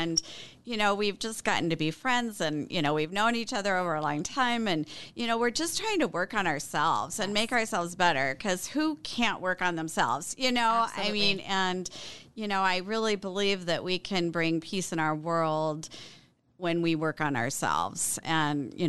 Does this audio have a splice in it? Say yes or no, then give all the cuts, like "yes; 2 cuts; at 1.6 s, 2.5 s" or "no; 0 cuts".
no; 0 cuts